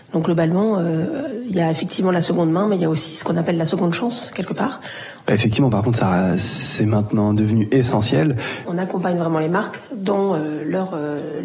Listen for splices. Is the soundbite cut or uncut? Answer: cut